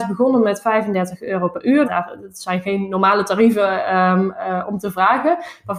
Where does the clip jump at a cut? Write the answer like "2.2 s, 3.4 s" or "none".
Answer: 1.8 s